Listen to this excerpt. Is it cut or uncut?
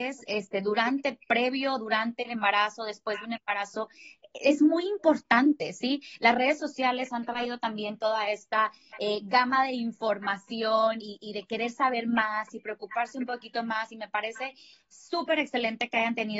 uncut